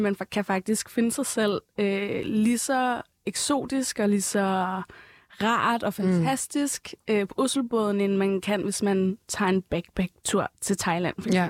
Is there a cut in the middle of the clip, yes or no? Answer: no